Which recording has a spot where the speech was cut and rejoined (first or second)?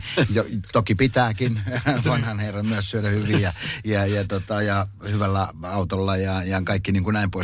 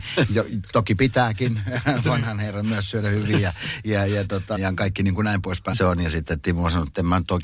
second